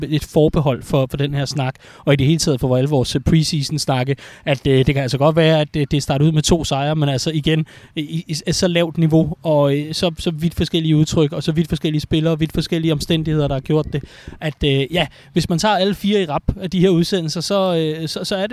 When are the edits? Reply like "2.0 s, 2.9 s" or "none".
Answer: none